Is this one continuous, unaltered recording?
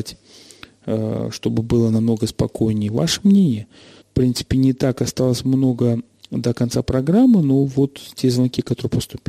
no; 1 cut; at 4.0 s

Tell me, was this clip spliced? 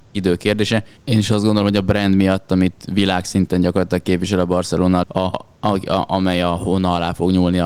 yes; 2 cuts; at 1.0 s, 5.0 s

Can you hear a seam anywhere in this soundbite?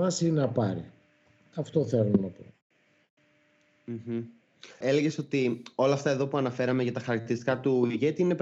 yes; 1 cut; at 4.8 s

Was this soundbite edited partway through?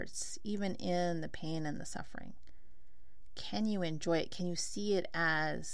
no; 0 cuts

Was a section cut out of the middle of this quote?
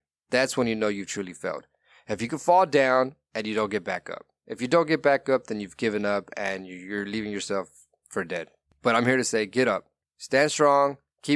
yes; 1 cut; at 10.0 s

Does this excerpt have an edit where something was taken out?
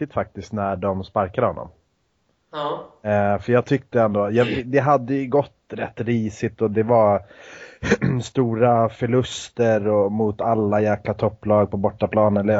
no; 0 cuts

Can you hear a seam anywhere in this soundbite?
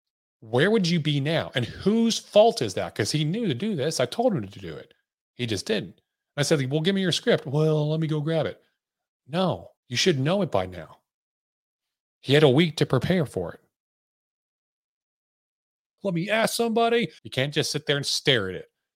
yes; 3 cuts; at 9.8 s, 16.0 s, 17.2 s

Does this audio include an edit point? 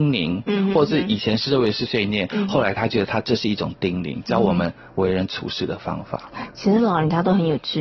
yes; 1 cut; at 1.9 s

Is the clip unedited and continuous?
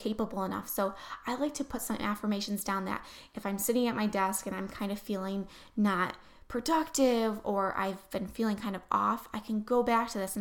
yes; 0 cuts

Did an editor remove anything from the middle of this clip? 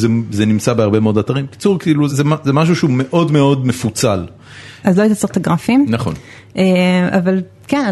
yes; 2 cuts; at 2.1 s, 4.8 s

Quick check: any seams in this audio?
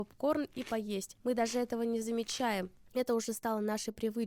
no; 0 cuts

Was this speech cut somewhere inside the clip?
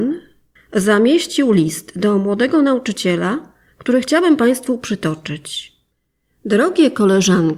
no; 0 cuts

